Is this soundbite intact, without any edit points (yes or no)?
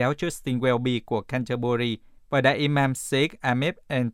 yes